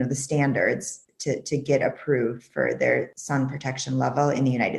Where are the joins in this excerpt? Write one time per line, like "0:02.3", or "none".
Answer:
none